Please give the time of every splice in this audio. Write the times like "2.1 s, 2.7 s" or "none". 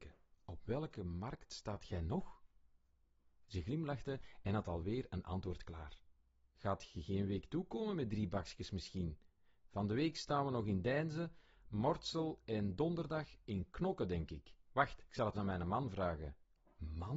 15.3 s